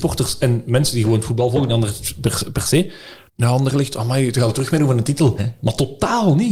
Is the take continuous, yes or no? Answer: no